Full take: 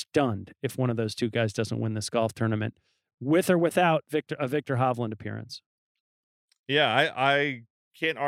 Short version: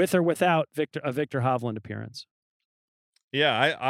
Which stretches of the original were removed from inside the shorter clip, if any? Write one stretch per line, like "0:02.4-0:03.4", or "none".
none